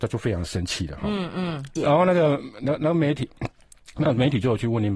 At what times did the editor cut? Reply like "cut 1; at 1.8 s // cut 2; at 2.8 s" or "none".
cut 1; at 1.8 s